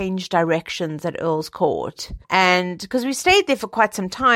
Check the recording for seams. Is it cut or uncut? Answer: cut